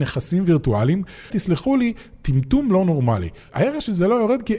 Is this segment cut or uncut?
cut